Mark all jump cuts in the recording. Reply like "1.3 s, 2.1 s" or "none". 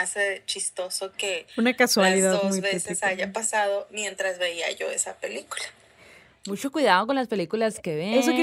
none